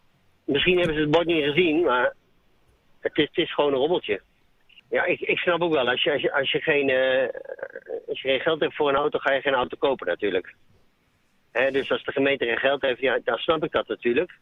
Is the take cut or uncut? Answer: uncut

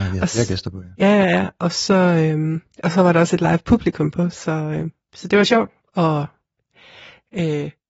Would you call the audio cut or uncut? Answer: uncut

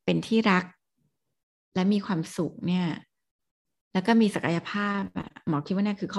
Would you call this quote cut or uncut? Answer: uncut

